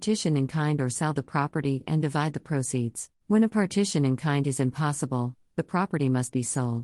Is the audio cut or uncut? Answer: cut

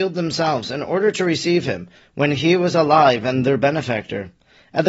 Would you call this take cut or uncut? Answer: cut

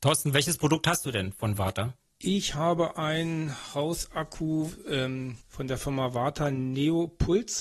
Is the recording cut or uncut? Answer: uncut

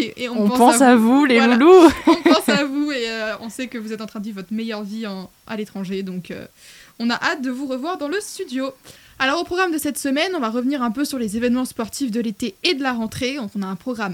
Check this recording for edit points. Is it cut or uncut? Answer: uncut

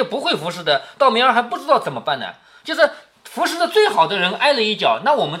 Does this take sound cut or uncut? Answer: uncut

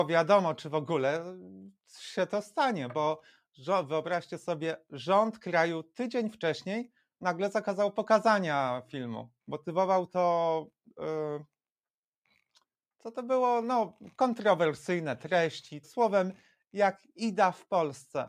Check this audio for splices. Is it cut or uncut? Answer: cut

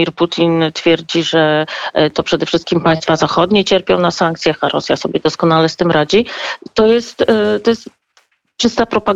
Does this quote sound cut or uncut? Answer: uncut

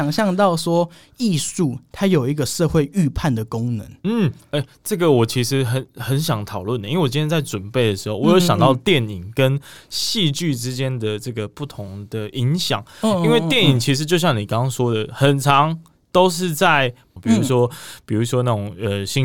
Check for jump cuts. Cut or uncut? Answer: cut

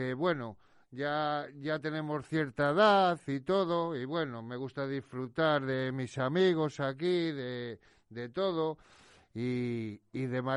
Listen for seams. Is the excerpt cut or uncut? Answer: uncut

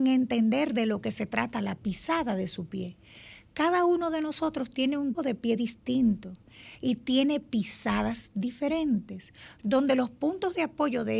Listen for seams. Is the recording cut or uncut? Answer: cut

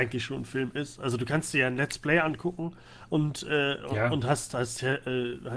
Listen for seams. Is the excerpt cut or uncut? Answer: uncut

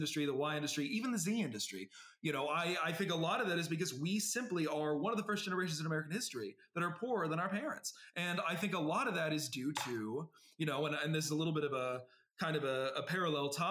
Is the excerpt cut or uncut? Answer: uncut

